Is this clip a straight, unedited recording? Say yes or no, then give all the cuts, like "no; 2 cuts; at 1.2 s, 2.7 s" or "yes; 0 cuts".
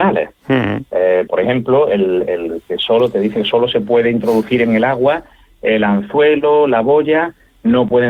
no; 1 cut; at 1.3 s